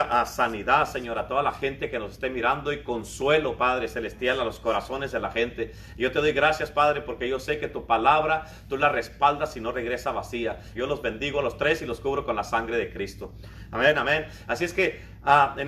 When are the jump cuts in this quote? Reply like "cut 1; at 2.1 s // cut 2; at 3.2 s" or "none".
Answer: cut 1; at 10.8 s